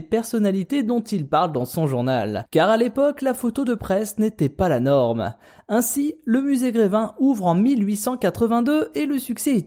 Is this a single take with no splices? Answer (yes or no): yes